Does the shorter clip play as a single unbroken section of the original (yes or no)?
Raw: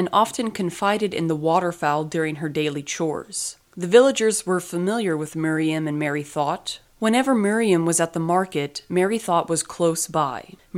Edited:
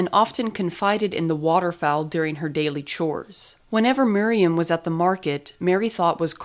no